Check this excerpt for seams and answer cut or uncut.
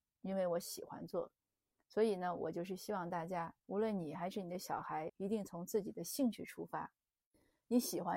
cut